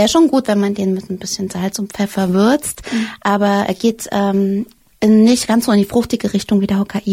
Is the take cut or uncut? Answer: uncut